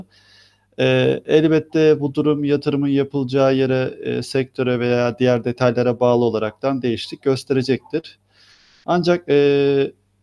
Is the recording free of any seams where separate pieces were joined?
yes; 0 cuts

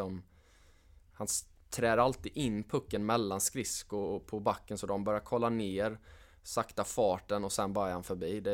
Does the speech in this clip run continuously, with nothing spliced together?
yes; 0 cuts

